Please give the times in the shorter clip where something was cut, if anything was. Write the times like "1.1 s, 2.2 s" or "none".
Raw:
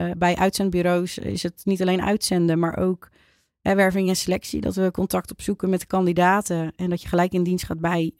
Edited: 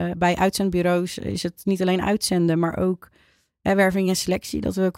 none